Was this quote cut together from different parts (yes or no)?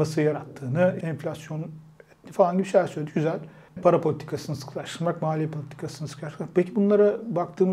yes